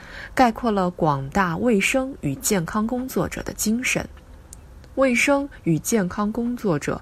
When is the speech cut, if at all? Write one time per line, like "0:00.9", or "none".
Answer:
none